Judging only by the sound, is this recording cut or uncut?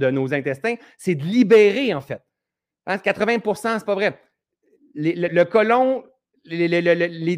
cut